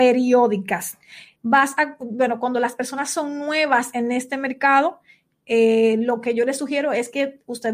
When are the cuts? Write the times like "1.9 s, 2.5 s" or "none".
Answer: 1.3 s